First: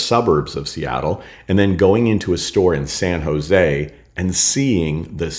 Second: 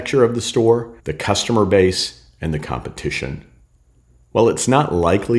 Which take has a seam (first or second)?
second